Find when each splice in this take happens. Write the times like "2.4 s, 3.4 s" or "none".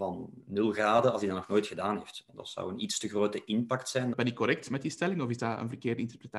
4.1 s